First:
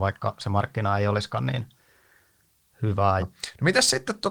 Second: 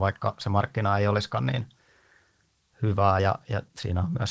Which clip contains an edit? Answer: first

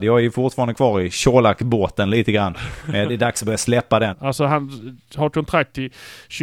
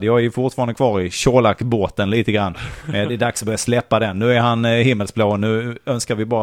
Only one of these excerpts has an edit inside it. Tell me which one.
first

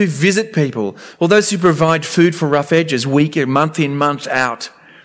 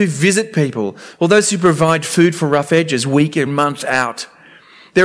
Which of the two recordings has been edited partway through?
second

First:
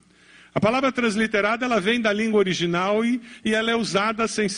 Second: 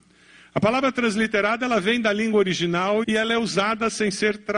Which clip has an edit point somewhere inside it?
second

